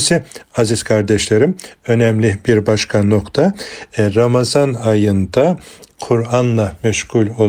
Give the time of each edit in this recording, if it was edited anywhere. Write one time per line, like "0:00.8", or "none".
none